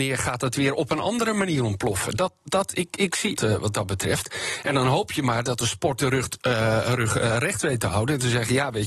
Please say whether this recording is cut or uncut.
cut